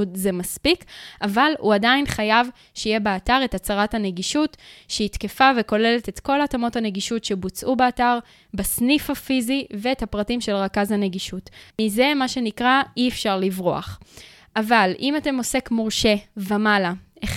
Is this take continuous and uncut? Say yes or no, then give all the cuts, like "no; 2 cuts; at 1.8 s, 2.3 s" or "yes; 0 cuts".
no; 1 cut; at 11.7 s